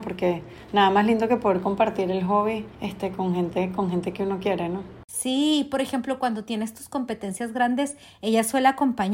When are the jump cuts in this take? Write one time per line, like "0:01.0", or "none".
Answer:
0:02.7